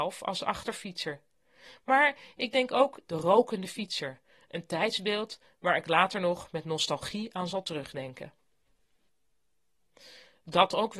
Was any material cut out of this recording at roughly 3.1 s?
yes; 1 cut; at 3.1 s

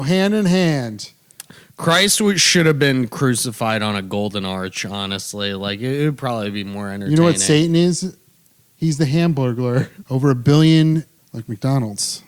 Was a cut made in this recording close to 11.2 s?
yes; 2 cuts; at 10.0 s, 11.2 s

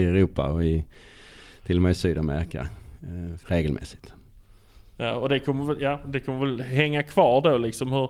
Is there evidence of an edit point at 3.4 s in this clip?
yes; 1 cut; at 3.4 s

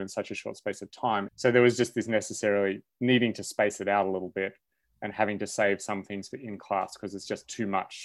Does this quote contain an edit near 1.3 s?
yes; 1 cut; at 1.3 s

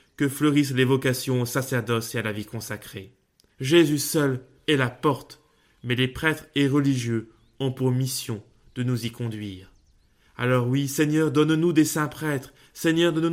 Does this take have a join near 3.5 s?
yes; 1 cut; at 3.5 s

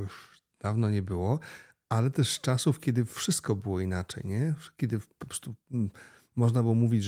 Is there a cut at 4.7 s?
no; 0 cuts

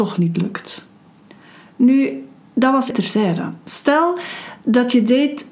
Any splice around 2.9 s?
yes; 1 cut; at 2.9 s

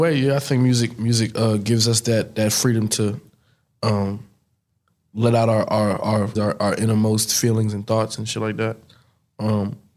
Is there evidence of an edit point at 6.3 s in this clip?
yes; 1 cut; at 6.3 s

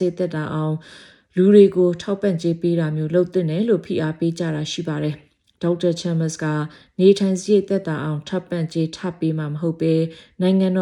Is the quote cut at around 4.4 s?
no; 0 cuts

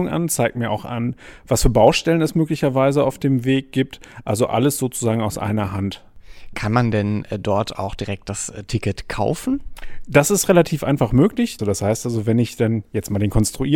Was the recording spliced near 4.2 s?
no; 1 cut; at 11.6 s

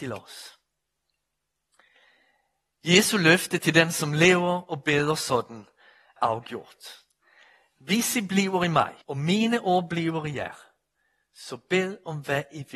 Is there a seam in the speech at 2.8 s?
no; 2 cuts; at 6.2 s, 9.0 s

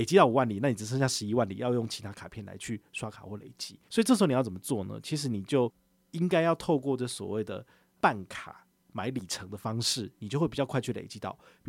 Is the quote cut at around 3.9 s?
yes; 1 cut; at 3.9 s

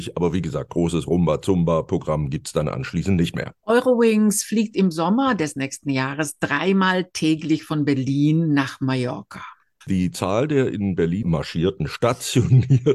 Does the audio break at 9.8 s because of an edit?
yes; 3 cuts; at 3.6 s, 9.8 s, 11.2 s

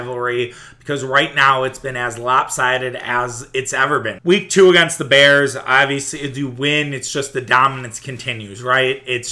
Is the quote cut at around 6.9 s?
no; 1 cut; at 4.2 s

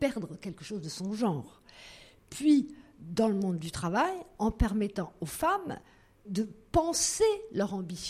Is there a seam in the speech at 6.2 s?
yes; 1 cut; at 6.2 s

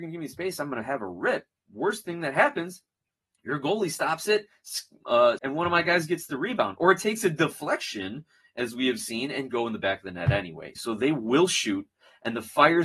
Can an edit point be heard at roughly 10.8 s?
yes; 2 cuts; at 5.4 s, 10.8 s

